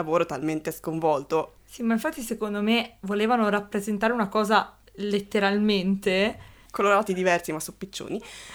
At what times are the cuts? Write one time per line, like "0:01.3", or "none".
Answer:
0:01.6
0:06.7